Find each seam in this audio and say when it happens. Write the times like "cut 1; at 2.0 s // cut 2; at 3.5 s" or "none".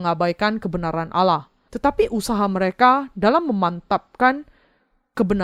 cut 1; at 1.7 s